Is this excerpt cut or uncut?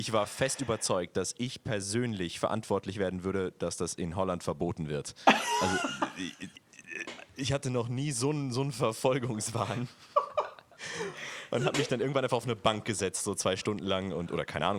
uncut